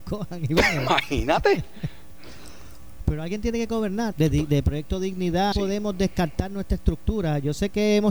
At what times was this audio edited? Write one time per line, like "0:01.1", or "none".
0:04.1
0:05.5